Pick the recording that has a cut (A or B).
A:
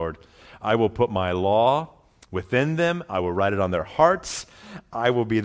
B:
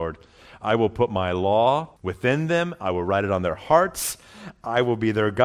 B